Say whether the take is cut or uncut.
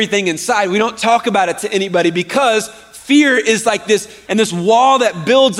cut